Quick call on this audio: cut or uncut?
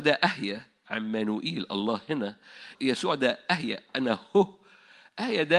cut